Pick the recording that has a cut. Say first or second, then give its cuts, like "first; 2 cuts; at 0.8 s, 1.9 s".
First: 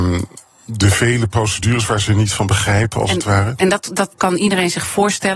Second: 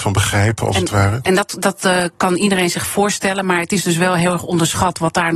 first; 1 cut; at 4.1 s